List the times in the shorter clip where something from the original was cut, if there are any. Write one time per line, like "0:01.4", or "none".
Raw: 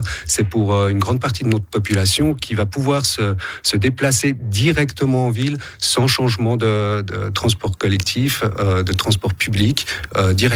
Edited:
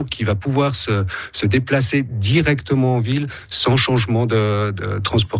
none